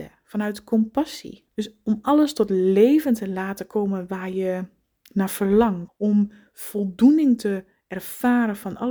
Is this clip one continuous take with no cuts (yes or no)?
no